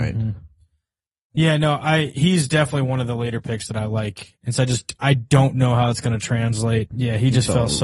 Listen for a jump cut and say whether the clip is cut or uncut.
cut